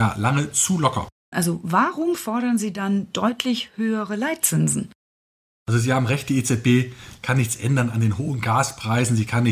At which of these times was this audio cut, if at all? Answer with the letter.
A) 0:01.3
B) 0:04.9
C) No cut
A